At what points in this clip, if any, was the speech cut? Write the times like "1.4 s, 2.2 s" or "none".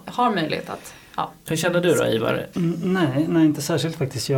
1.5 s, 2.5 s